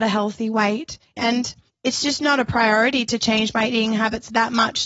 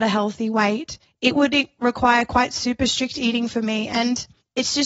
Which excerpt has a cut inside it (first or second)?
first